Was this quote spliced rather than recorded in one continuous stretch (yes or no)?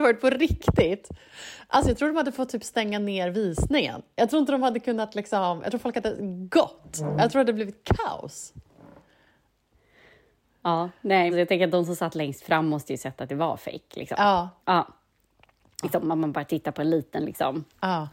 yes